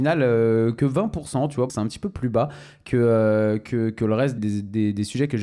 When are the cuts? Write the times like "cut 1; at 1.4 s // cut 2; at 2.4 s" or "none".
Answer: cut 1; at 1.7 s // cut 2; at 4.4 s